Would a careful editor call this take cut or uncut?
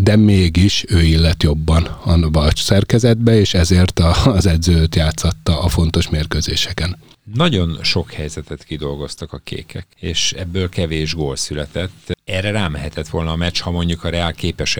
uncut